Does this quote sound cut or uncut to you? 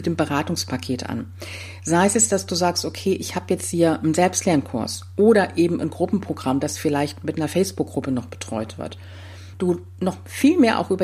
cut